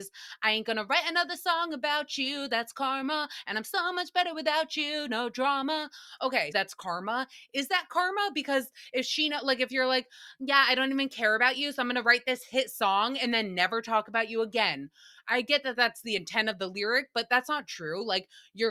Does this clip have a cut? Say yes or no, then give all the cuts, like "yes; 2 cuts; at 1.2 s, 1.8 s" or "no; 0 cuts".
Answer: yes; 1 cut; at 6.5 s